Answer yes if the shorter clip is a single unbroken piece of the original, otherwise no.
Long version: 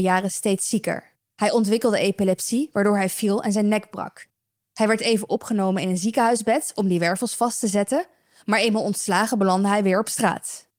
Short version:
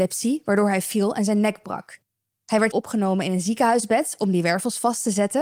no